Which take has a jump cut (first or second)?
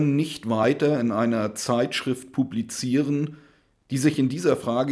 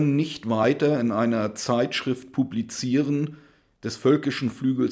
second